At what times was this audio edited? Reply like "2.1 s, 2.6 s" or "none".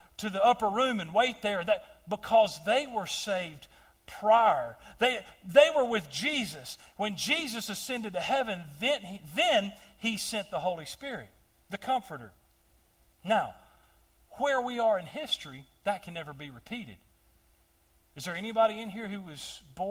none

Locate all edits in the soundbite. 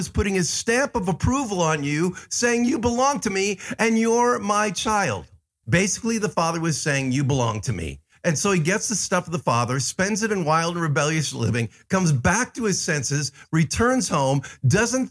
5.6 s, 8.1 s

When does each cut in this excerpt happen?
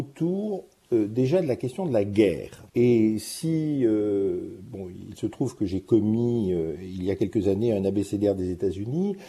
2.7 s

